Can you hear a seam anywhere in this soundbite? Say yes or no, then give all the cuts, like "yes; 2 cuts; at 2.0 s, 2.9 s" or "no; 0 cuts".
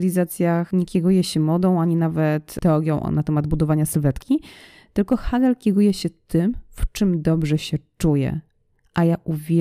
no; 0 cuts